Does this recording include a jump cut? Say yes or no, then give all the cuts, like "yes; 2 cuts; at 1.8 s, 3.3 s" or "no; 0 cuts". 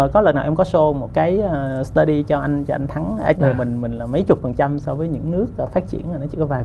yes; 1 cut; at 3.3 s